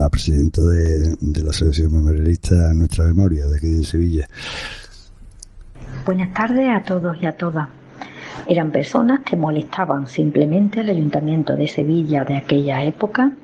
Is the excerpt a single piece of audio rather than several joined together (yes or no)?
no